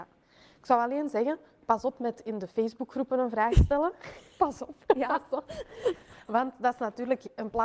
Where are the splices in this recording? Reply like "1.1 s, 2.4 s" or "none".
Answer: none

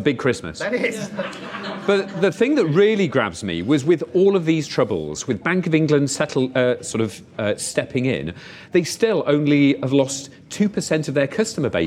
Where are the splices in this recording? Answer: 5.3 s

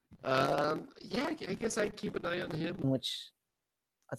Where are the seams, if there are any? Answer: 1.5 s, 2.8 s

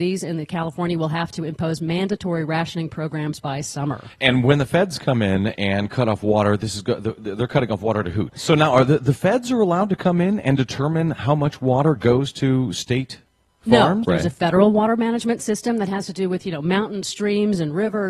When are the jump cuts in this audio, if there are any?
8.3 s, 14.0 s

